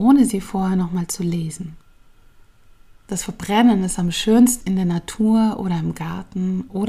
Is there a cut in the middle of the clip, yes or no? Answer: yes